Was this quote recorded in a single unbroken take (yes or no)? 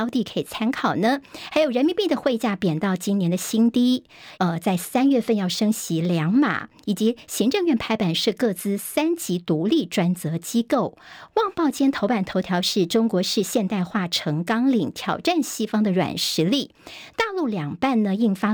no